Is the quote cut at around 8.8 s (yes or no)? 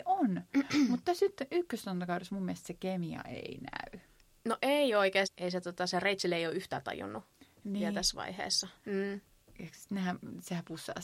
yes